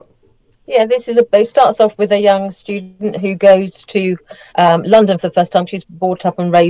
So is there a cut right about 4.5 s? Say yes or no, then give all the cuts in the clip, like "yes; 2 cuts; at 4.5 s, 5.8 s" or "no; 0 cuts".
yes; 1 cut; at 4.5 s